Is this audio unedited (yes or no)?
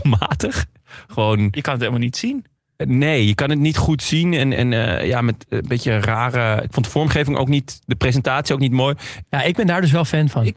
no